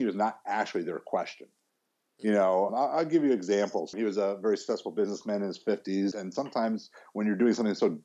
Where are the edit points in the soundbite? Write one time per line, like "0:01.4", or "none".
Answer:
0:02.7
0:03.9
0:06.1